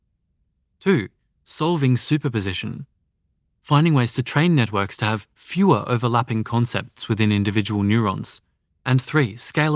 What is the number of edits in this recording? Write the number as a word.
one